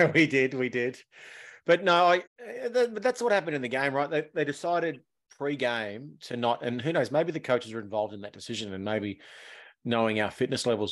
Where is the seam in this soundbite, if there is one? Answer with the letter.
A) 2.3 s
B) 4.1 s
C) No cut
A